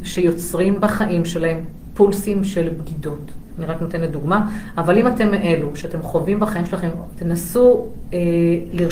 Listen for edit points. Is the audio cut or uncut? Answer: cut